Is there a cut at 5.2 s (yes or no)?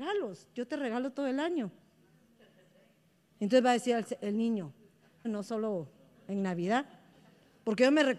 yes